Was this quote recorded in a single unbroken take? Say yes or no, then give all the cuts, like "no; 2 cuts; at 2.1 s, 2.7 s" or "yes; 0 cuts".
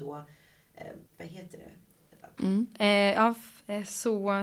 no; 2 cuts; at 1.1 s, 2.4 s